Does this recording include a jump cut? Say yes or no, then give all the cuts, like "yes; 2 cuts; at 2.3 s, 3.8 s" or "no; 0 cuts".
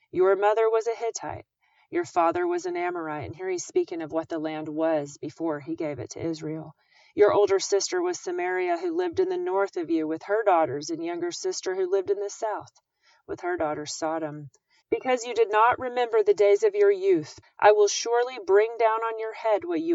yes; 2 cuts; at 14.8 s, 17.4 s